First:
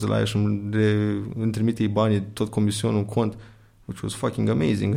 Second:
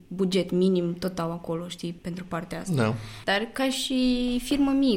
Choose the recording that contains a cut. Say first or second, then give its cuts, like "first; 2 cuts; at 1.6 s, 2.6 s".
second; 2 cuts; at 2.0 s, 3.2 s